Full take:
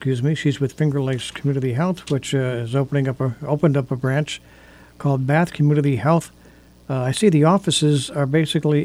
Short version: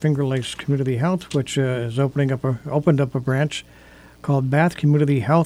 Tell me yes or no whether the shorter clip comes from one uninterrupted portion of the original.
yes